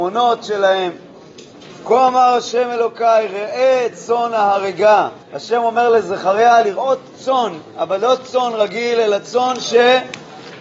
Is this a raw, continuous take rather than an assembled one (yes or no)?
no